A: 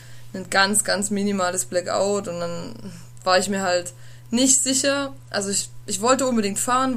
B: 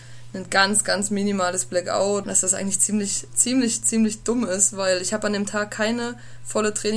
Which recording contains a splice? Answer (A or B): B